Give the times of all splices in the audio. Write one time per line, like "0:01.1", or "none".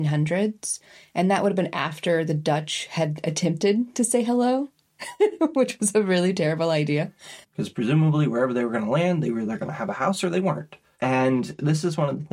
0:07.4